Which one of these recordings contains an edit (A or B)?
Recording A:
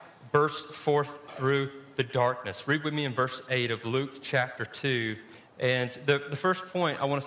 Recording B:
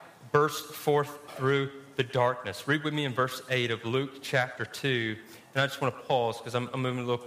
A